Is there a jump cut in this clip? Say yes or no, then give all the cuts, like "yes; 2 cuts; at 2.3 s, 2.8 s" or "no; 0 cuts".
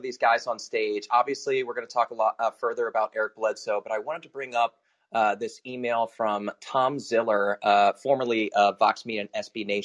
no; 0 cuts